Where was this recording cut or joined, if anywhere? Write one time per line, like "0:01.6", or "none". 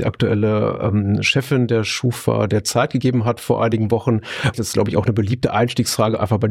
0:04.5